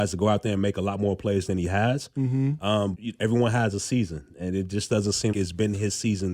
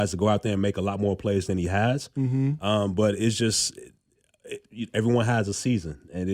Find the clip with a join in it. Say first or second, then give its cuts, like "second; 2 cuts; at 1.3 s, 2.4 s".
first; 2 cuts; at 2.9 s, 5.3 s